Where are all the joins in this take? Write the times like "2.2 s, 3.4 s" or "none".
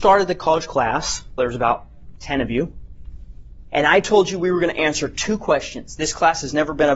1.4 s